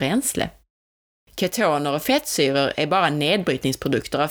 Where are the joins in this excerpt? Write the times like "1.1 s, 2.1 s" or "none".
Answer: 1.2 s